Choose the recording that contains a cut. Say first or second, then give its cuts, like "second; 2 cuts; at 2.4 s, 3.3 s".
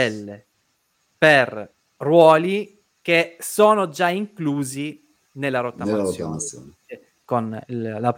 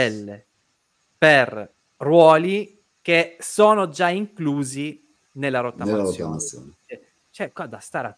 first; 1 cut; at 7.2 s